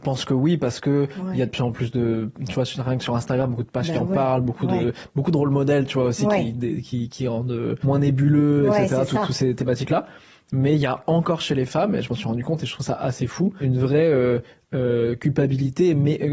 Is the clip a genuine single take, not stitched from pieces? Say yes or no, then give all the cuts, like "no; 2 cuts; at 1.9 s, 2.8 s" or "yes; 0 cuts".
yes; 0 cuts